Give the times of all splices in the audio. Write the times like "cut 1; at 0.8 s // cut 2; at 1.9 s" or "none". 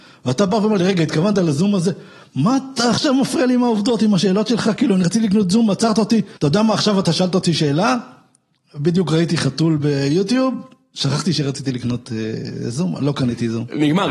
cut 1; at 6.4 s